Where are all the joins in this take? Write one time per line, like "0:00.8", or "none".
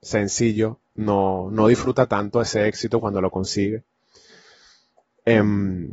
none